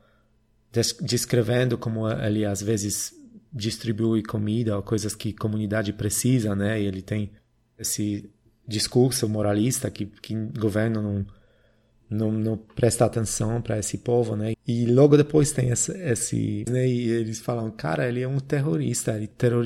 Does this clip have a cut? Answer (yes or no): yes